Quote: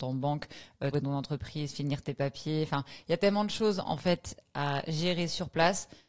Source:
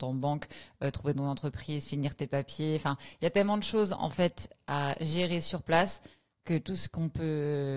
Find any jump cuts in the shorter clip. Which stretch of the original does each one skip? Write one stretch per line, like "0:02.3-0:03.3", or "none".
0:00.9-0:01.0